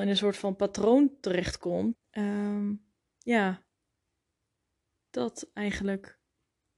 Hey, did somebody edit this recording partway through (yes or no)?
yes